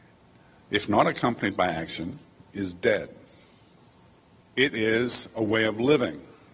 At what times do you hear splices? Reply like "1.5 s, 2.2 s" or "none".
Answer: 4.5 s

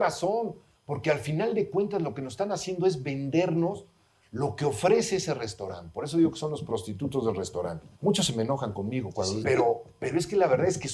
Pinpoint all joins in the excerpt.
7.9 s, 9.4 s

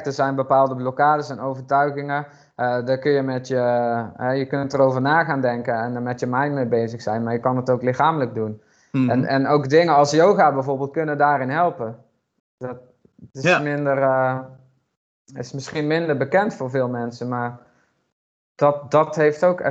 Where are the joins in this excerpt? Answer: none

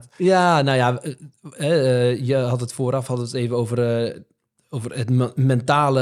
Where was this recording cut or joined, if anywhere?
none

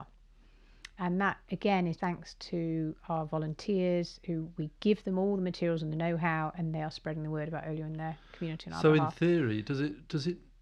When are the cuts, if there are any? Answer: 2.0 s

